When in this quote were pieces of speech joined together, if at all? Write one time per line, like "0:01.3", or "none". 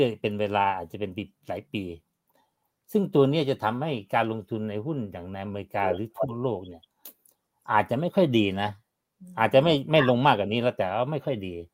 none

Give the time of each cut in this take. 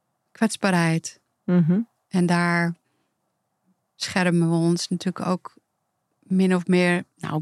none

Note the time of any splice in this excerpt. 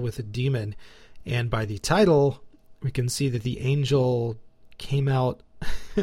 none

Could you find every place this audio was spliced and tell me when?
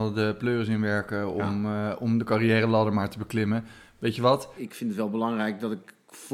0:04.6

